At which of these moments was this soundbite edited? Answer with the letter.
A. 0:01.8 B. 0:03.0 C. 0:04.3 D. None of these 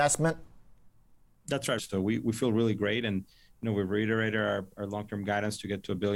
A